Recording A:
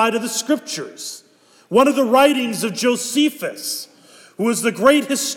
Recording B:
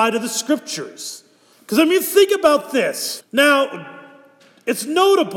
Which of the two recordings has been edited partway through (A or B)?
B